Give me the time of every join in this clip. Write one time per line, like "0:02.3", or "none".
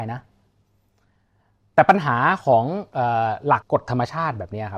0:03.6